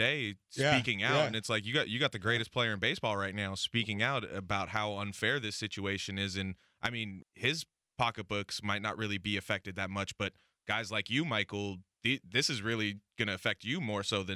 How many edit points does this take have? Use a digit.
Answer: 1